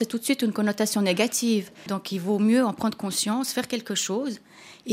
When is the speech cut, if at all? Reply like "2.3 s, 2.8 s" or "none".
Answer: 1.9 s

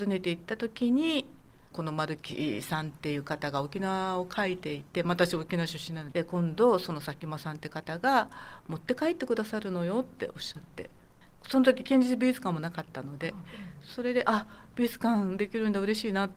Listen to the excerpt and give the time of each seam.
6.1 s

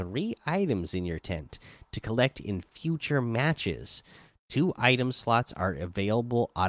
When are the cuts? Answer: none

